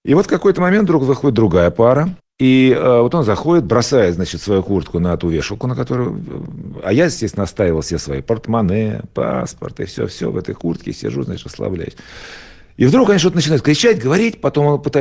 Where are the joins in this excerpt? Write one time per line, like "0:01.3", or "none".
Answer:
none